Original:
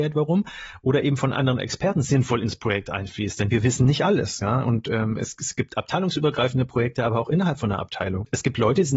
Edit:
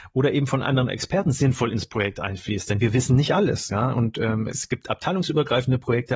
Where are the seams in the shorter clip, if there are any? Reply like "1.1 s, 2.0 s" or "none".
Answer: 4.5 s